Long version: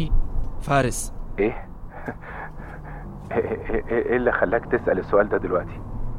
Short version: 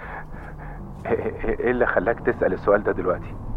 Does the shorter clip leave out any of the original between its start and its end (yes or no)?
yes